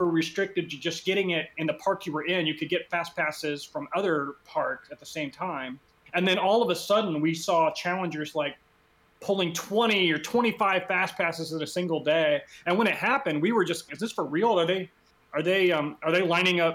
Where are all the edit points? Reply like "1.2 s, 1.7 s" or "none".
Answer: 13.9 s